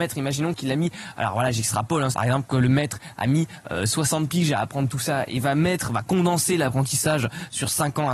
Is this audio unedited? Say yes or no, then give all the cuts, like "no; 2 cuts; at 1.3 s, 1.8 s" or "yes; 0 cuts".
no; 1 cut; at 2.1 s